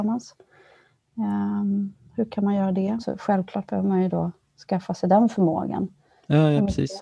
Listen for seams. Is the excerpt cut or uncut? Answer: cut